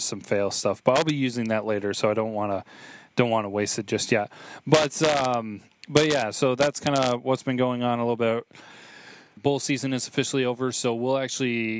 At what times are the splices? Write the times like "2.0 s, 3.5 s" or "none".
9.4 s